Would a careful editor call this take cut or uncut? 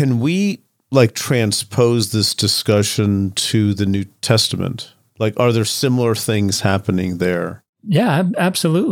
uncut